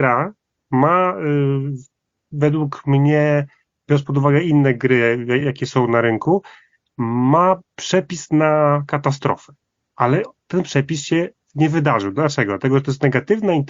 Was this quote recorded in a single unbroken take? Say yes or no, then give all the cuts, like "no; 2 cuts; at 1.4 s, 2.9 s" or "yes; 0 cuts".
yes; 0 cuts